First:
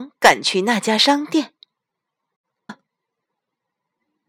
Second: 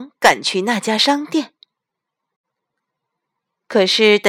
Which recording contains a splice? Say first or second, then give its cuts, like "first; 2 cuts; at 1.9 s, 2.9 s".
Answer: first; 1 cut; at 2.7 s